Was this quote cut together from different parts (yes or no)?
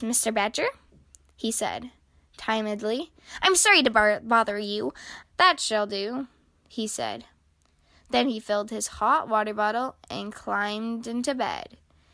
yes